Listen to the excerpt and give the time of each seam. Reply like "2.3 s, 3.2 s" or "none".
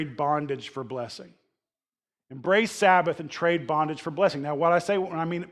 none